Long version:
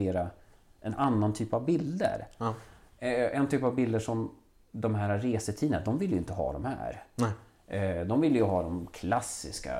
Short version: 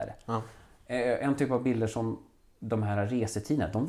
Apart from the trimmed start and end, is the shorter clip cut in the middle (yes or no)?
no